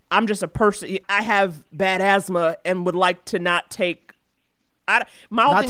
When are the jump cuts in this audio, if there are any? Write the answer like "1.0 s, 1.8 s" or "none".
1.0 s